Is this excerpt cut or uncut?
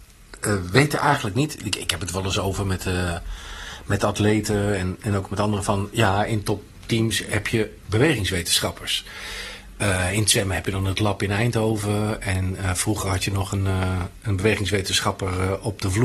uncut